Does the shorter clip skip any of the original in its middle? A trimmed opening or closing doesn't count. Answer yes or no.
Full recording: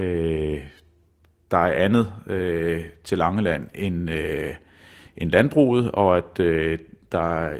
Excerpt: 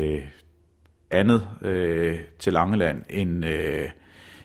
yes